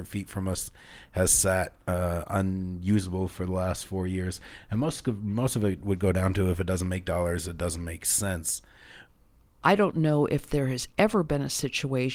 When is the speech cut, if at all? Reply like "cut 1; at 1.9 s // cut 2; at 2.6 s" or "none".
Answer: none